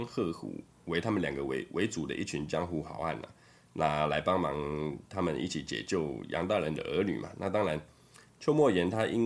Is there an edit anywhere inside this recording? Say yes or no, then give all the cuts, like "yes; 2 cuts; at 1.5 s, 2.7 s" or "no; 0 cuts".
no; 0 cuts